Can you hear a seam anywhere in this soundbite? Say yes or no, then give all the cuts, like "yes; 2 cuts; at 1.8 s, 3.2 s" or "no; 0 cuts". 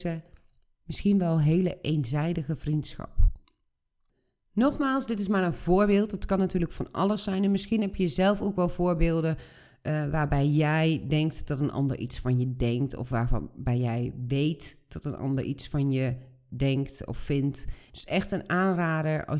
yes; 1 cut; at 17.9 s